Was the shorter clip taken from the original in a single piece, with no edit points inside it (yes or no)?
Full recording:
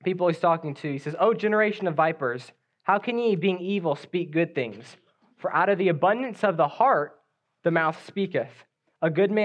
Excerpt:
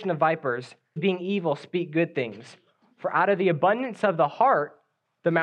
no